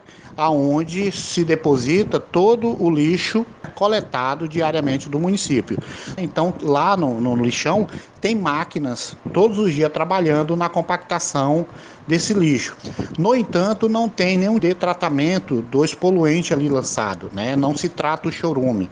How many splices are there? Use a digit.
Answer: 2